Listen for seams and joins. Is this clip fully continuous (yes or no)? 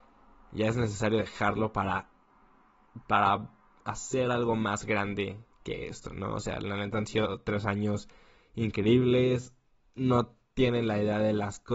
yes